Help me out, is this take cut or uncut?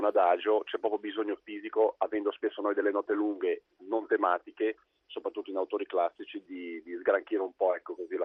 cut